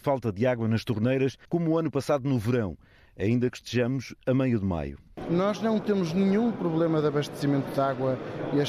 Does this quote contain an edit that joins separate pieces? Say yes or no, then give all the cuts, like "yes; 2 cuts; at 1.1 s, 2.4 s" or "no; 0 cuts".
yes; 1 cut; at 1.4 s